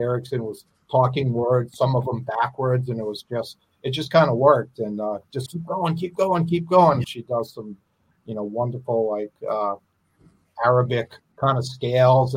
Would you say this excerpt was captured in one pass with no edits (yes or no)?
no